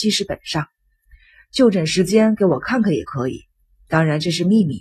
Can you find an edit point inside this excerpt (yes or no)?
no